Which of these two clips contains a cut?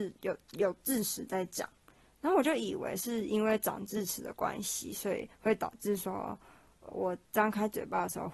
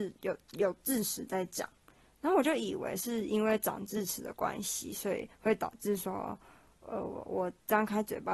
first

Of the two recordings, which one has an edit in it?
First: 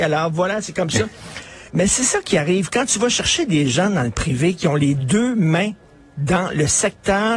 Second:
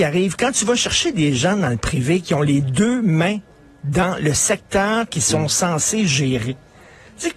first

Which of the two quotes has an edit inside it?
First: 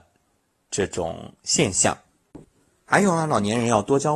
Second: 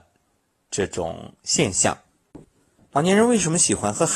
second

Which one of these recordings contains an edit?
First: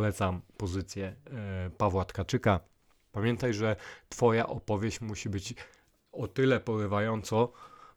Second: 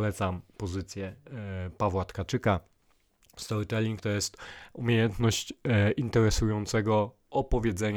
first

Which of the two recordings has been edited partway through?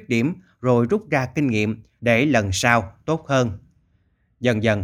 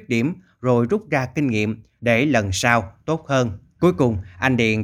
second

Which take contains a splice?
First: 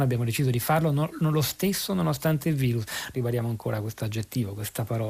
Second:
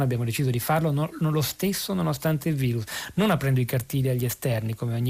first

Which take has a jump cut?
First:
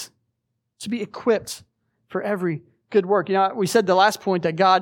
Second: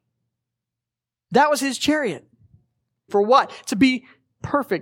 second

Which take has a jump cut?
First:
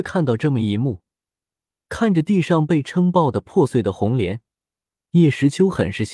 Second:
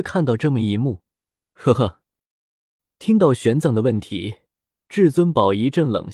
second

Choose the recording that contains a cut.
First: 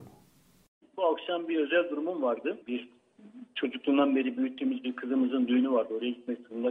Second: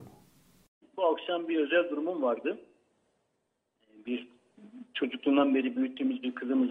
first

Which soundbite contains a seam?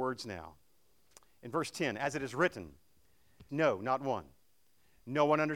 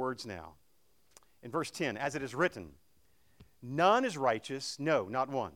first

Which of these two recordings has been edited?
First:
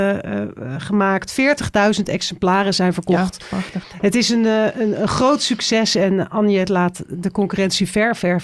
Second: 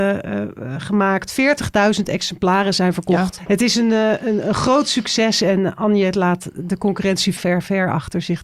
second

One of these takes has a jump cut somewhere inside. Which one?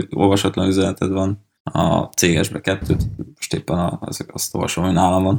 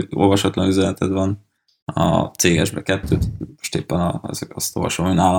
first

